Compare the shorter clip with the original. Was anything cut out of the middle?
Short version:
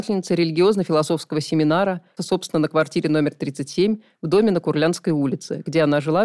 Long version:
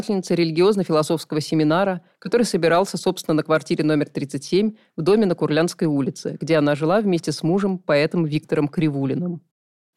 yes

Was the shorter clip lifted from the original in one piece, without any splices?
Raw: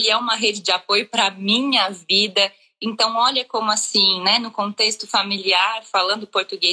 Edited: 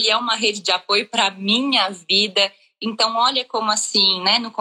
yes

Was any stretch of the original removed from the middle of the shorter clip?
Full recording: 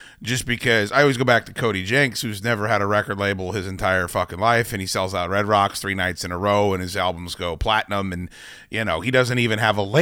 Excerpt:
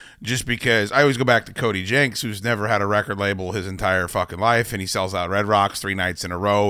no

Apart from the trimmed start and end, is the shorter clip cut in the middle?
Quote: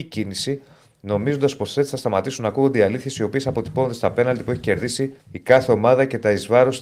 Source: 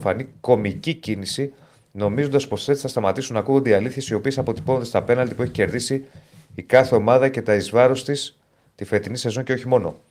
yes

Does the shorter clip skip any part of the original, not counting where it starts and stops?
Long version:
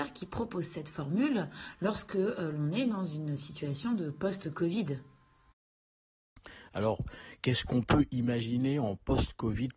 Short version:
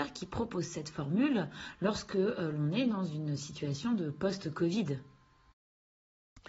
no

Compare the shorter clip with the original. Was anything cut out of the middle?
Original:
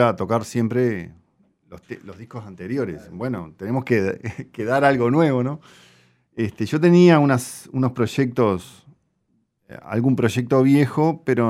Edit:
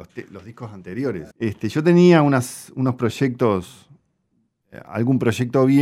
yes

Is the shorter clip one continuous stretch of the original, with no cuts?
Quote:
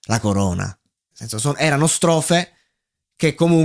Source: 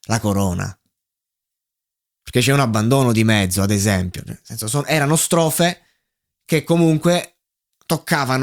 no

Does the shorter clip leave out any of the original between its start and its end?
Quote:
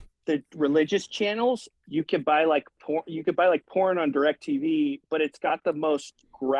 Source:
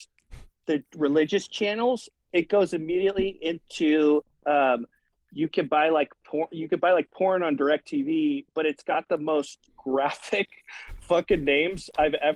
yes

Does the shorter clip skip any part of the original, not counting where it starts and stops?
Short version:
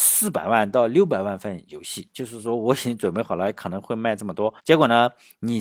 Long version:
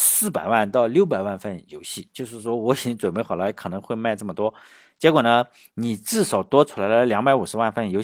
yes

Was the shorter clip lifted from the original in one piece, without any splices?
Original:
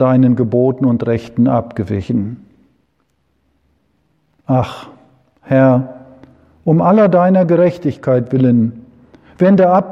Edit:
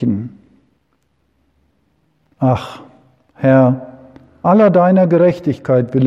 no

